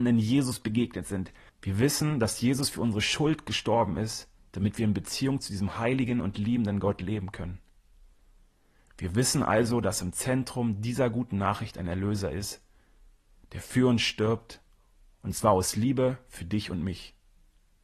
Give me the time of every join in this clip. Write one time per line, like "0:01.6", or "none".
0:01.5